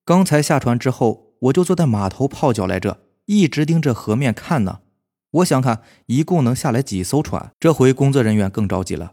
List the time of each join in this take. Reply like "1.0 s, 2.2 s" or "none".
5.6 s, 7.5 s

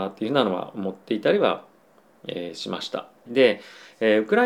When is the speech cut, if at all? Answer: 3.3 s

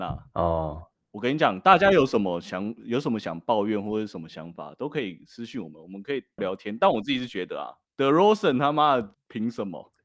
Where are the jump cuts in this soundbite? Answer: 6.4 s

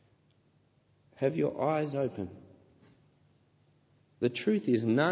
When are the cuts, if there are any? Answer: none

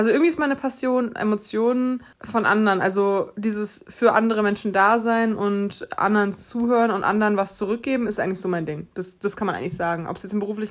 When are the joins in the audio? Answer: 2.1 s

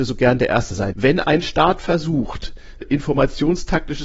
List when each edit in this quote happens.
0.9 s, 2.8 s

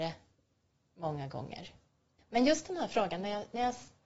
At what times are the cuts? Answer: 2.2 s

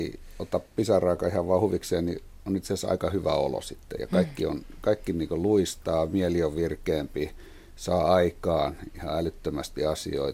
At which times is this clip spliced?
none

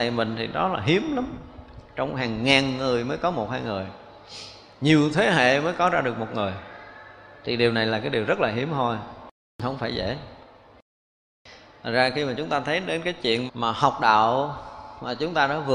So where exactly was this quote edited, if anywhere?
13.5 s

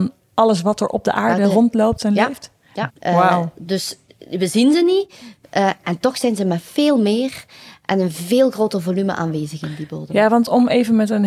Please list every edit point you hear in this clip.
2.9 s

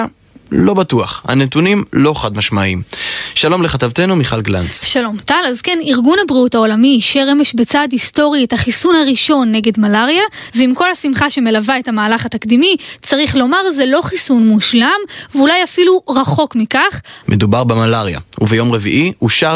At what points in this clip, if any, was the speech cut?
10.5 s, 17.2 s

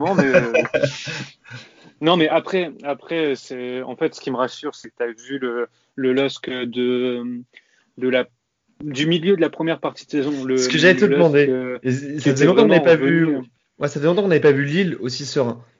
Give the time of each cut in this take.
none

